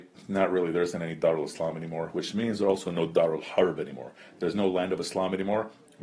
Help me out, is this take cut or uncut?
uncut